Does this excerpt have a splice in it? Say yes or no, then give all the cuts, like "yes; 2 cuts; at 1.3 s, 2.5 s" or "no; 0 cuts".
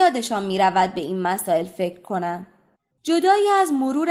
yes; 1 cut; at 2.9 s